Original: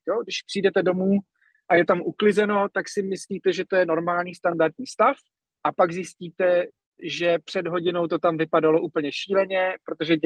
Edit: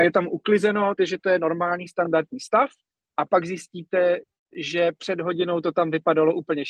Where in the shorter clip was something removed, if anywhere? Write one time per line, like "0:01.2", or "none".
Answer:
0:01.0